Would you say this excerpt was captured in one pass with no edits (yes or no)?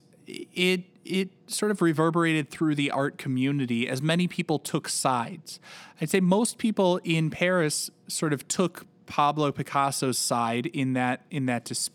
yes